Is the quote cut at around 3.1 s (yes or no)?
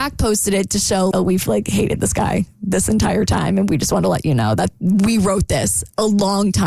no